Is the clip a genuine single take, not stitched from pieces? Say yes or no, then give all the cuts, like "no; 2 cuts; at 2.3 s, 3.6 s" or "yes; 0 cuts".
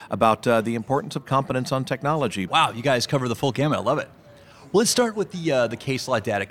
no; 1 cut; at 2.5 s